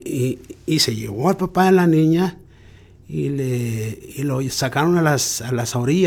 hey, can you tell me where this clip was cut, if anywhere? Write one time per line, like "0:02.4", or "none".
none